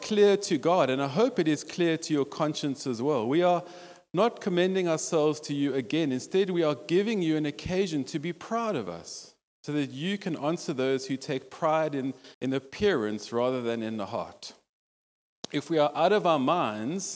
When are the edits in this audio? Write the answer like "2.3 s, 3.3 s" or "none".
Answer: 12.3 s